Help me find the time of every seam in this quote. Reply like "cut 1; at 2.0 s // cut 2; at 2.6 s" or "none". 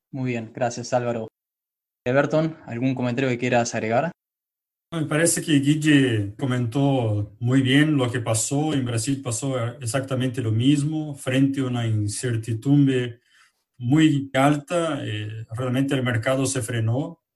cut 1; at 6.4 s // cut 2; at 14.3 s